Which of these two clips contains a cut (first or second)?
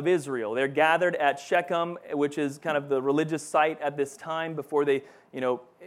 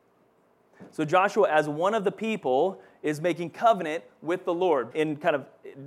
second